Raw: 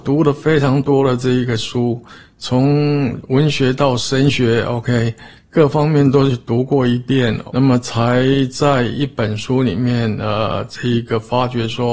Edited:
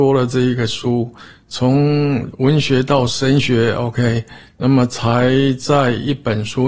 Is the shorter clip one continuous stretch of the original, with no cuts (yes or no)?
no